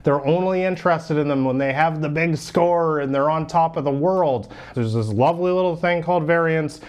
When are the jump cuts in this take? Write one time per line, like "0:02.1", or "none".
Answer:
0:04.7